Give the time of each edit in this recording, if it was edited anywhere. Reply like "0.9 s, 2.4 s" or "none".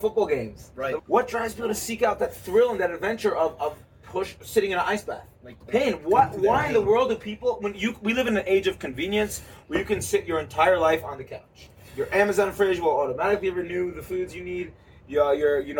1.0 s, 5.6 s